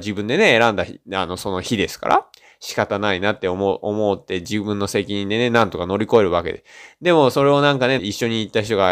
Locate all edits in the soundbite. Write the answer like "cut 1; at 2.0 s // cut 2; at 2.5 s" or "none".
cut 1; at 1.0 s // cut 2; at 8.0 s